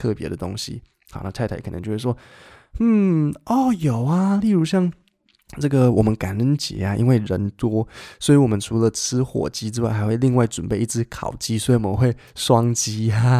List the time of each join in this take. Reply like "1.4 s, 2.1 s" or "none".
none